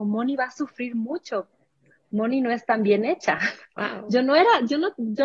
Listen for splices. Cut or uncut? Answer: cut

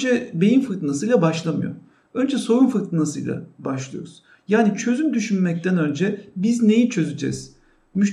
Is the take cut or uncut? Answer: uncut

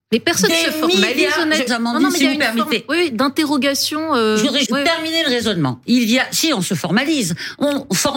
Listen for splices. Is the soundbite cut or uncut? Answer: cut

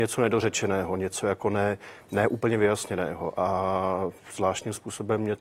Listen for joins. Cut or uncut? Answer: uncut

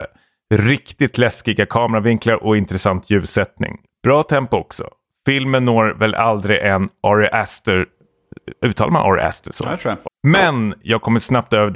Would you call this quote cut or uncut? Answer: cut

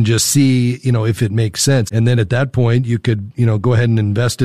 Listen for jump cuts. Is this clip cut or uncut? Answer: cut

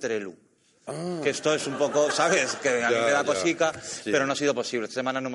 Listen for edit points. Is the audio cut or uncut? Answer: uncut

